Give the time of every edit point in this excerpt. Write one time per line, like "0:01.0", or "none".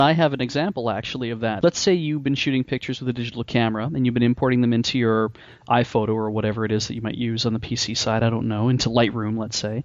none